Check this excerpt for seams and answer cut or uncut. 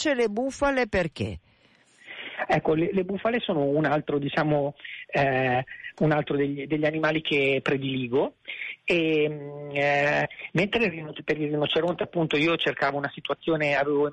uncut